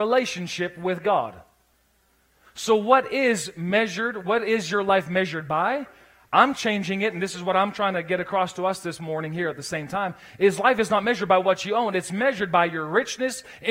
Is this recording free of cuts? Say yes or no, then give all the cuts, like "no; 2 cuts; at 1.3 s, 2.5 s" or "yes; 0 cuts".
yes; 0 cuts